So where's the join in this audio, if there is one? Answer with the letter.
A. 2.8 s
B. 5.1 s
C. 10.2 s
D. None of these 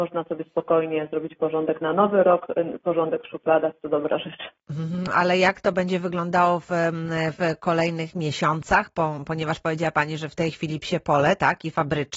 B